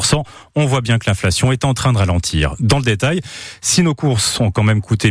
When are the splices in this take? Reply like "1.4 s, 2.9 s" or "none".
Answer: none